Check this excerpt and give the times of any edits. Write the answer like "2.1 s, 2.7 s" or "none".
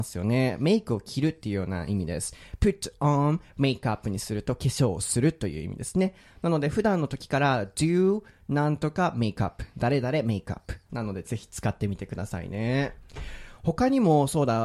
10.9 s